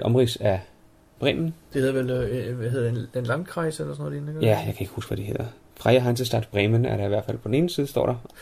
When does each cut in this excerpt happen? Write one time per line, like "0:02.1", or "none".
none